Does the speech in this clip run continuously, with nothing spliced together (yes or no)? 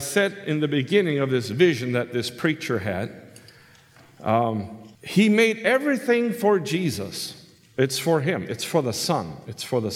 no